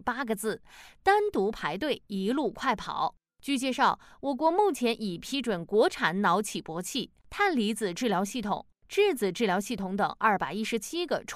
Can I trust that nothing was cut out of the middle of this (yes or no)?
yes